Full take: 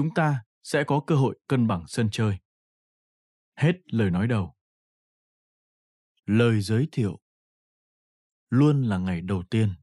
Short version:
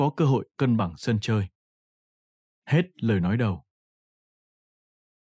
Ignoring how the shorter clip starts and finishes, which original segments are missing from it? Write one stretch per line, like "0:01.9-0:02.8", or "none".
none